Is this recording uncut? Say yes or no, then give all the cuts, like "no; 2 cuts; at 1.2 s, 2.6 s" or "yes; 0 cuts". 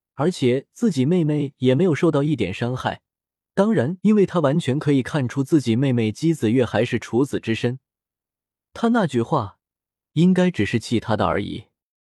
no; 1 cut; at 4.0 s